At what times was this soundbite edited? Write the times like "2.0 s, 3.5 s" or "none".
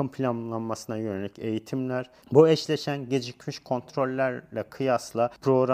2.2 s